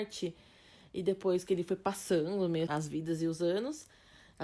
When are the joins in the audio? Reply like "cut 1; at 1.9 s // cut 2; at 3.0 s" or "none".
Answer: cut 1; at 2.7 s